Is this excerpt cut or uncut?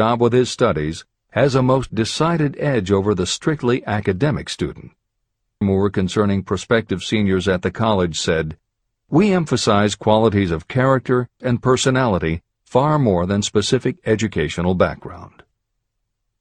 cut